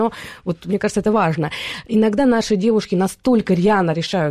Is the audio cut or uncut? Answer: uncut